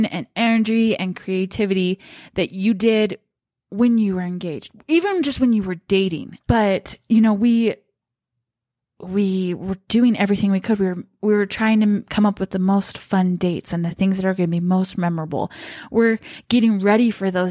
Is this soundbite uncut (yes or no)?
no